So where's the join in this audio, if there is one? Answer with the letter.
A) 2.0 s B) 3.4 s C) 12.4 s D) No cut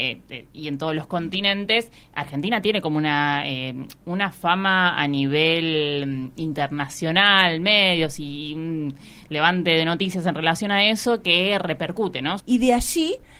C